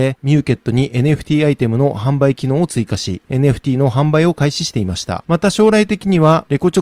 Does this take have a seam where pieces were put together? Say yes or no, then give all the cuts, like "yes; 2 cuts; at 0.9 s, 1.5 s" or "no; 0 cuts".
yes; 1 cut; at 5.2 s